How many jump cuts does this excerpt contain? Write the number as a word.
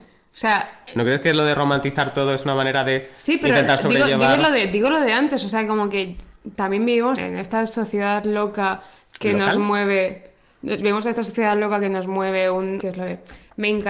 two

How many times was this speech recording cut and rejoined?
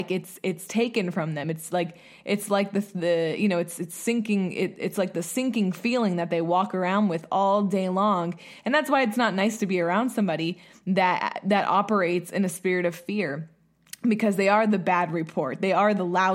zero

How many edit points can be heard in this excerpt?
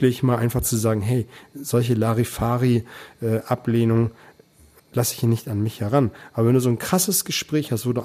one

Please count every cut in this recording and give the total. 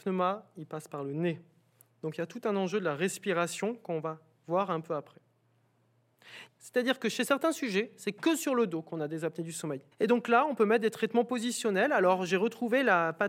two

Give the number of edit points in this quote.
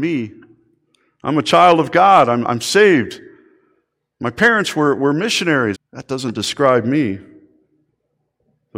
one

